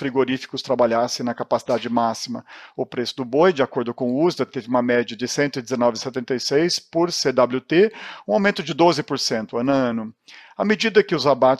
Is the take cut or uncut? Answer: uncut